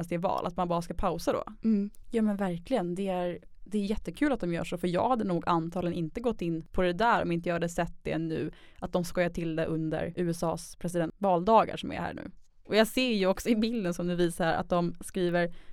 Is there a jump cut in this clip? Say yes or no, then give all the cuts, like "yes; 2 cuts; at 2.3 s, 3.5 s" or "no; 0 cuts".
yes; 1 cut; at 2.0 s